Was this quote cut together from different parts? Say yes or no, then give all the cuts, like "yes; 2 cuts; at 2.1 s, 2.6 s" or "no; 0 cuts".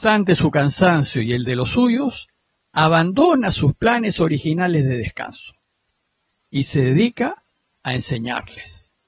no; 0 cuts